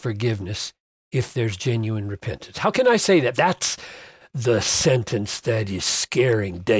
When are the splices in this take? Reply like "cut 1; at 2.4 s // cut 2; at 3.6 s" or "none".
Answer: cut 1; at 3.3 s